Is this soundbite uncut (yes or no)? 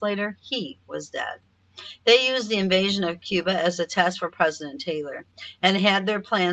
yes